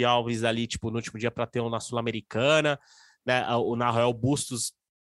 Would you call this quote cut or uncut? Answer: uncut